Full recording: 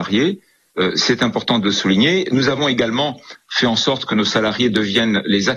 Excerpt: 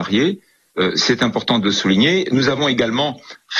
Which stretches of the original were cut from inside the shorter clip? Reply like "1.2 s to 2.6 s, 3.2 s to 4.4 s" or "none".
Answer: none